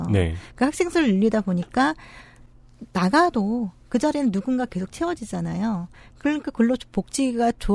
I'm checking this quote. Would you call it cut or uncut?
uncut